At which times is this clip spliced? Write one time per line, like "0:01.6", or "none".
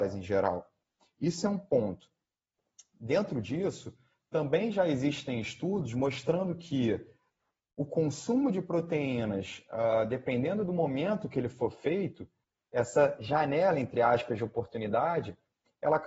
none

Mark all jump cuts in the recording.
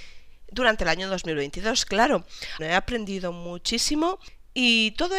0:02.6

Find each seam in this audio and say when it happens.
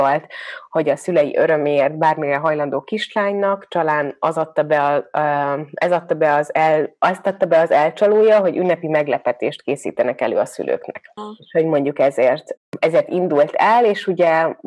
0:11.2

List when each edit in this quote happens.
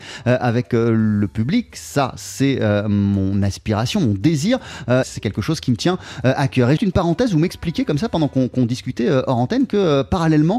0:05.0
0:06.8

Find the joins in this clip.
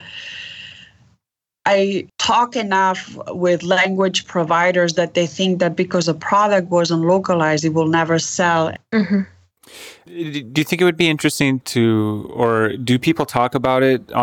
0:08.8

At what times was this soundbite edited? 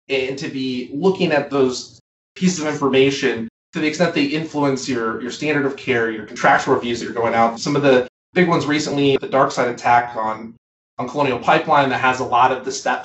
0:09.2

